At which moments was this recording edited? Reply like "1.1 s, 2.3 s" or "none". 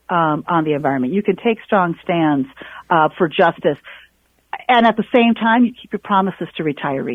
none